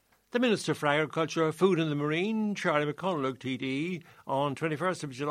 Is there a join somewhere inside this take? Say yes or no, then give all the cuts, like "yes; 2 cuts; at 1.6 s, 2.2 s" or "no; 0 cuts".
no; 0 cuts